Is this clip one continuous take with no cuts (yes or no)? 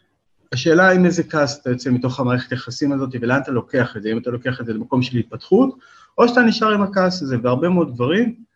yes